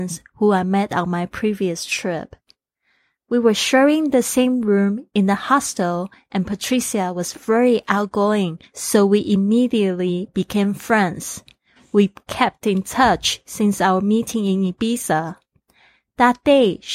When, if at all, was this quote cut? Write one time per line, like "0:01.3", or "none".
0:03.2

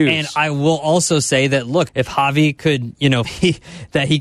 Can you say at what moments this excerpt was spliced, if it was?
0:01.9
0:03.2

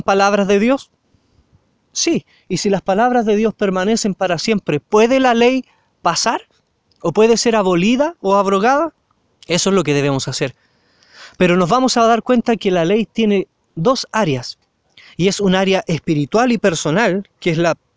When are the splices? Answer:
0:09.3

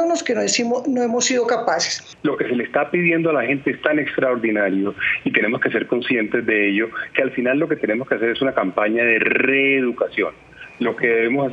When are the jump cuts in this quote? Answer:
0:02.1
0:07.1

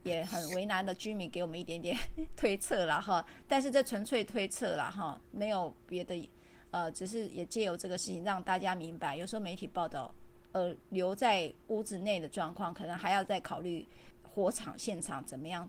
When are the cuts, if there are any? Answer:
0:10.3

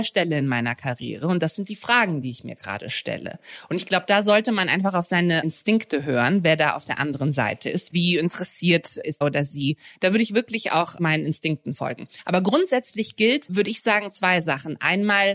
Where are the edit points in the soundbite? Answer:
0:07.9
0:09.2

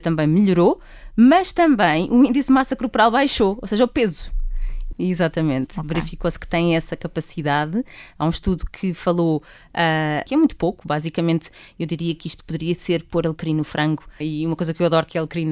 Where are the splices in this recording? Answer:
0:04.9
0:10.3
0:14.2

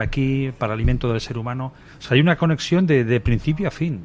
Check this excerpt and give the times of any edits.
none

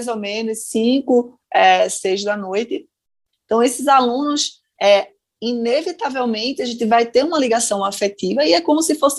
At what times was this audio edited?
0:03.3

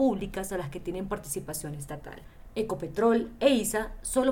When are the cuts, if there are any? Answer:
none

